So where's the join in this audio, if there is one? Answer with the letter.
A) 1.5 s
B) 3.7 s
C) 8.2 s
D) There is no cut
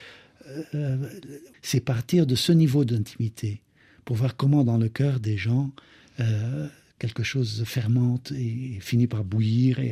A